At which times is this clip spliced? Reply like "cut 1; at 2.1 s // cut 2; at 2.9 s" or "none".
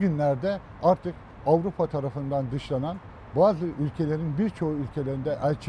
cut 1; at 3.3 s